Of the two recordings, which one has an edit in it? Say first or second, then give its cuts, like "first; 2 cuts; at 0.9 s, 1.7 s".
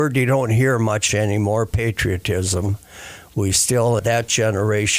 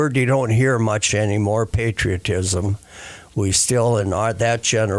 first; 1 cut; at 4.0 s